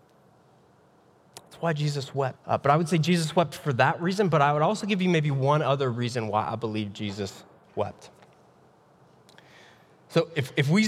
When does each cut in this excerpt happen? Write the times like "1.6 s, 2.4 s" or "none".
2.4 s